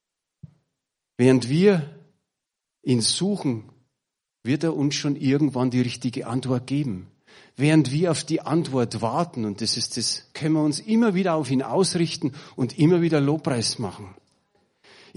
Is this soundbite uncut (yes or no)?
no